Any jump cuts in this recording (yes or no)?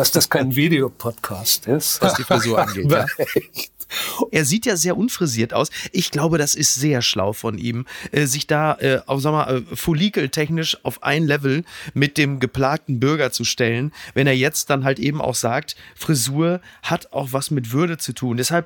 yes